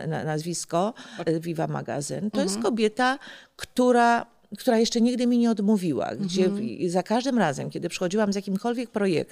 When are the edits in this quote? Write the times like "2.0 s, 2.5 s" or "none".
1.2 s